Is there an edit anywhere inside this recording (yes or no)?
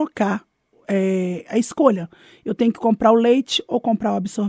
no